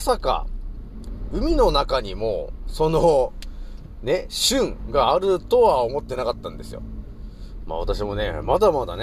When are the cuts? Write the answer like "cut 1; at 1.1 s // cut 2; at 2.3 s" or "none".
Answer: cut 1; at 7.6 s